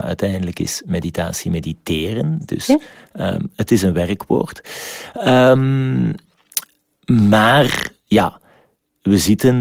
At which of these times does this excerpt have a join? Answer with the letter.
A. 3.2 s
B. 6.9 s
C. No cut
C